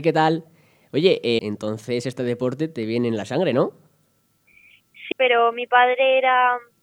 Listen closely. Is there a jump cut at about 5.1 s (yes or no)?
yes